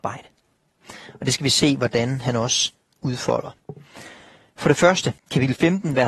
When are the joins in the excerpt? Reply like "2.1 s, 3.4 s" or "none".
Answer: 5.2 s